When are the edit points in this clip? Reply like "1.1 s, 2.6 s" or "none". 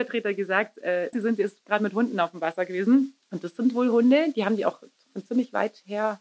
1.1 s, 3.2 s